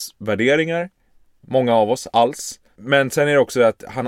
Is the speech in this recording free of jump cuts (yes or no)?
no